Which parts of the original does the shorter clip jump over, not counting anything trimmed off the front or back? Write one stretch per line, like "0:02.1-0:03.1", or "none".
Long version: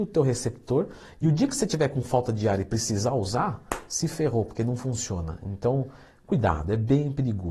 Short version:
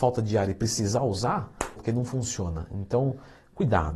0:03.9-0:04.5